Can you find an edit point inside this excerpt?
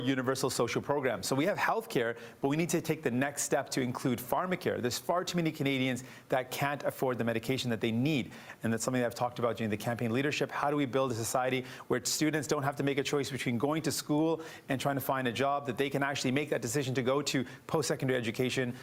yes; 1 cut; at 8.6 s

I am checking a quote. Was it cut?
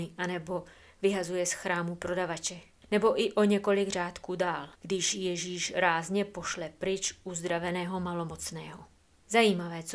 yes; 2 cuts; at 2.8 s, 4.7 s

